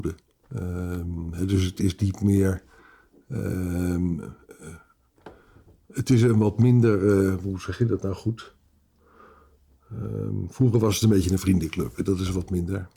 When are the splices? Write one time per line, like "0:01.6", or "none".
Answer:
none